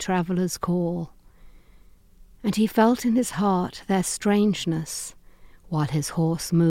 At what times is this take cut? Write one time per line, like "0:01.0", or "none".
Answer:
0:05.5

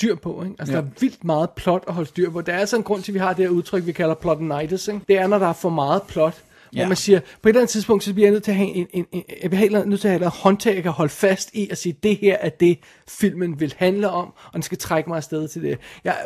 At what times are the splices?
0:05.0
0:08.7

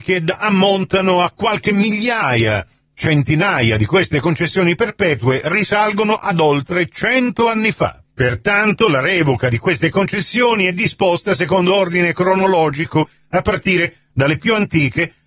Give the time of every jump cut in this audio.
none

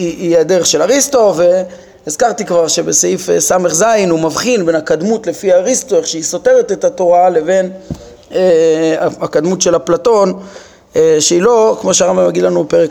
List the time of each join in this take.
none

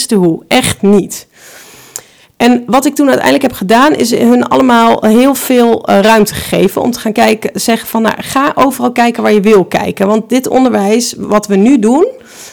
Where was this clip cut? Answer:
none

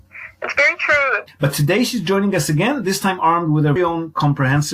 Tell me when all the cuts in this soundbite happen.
0:01.3
0:03.8

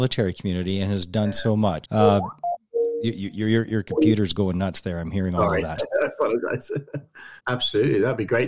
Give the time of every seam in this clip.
0:01.8
0:07.4

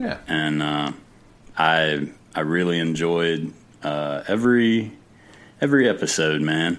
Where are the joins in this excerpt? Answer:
none

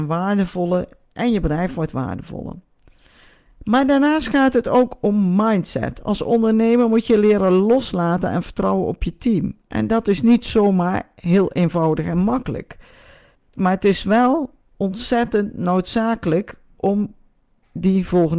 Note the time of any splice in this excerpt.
0:13.3

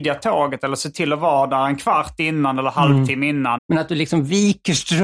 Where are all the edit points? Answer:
0:03.6

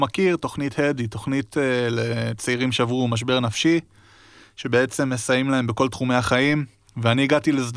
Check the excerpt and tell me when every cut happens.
none

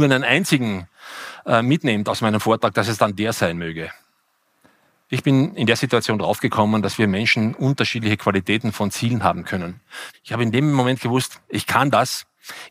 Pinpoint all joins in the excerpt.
0:10.1

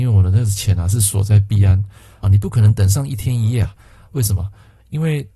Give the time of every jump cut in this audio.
0:02.2
0:04.1

